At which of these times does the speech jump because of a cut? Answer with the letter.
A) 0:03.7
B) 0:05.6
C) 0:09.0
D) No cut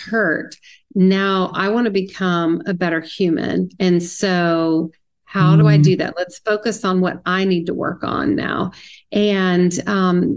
D